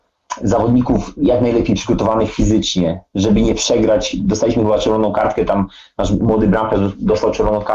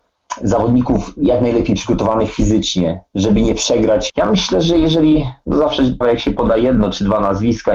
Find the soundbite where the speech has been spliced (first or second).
second